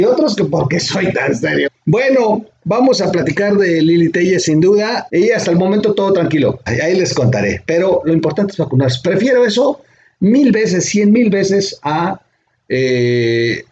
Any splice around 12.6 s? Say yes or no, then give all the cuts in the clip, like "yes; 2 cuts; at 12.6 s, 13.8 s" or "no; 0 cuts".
no; 3 cuts; at 1.7 s, 5.1 s, 6.7 s